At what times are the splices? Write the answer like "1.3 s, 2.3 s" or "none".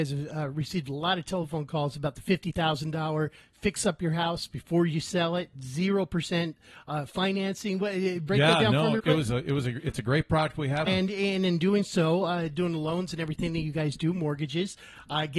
9.0 s, 10.9 s